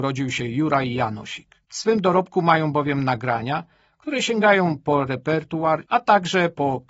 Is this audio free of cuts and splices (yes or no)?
no